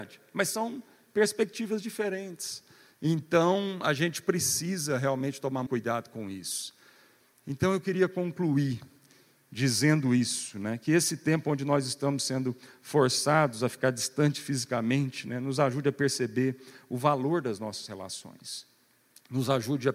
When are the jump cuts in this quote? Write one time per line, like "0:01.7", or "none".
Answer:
0:05.7